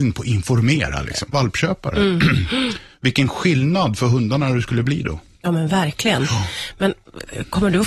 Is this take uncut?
no; 1 cut; at 1.3 s

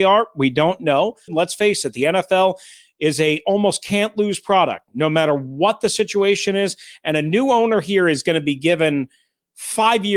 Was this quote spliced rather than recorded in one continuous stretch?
yes; 1 cut; at 1.3 s

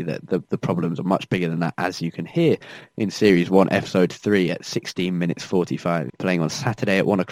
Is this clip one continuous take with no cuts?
no; 1 cut; at 6.1 s

